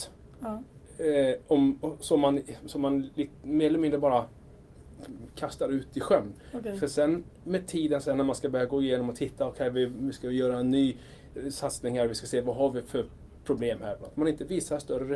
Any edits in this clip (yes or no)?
yes